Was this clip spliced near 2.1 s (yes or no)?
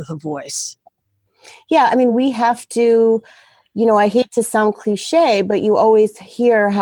no